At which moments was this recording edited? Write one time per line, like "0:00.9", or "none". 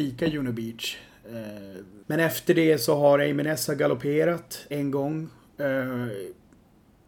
0:02.0
0:04.7